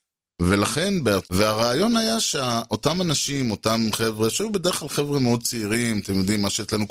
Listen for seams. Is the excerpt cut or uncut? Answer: cut